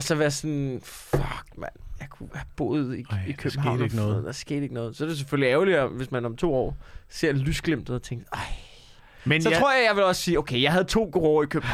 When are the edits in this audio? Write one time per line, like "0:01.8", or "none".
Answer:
none